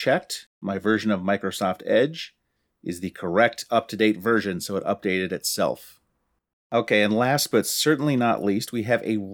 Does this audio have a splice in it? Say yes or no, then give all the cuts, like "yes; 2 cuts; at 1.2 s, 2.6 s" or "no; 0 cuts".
no; 0 cuts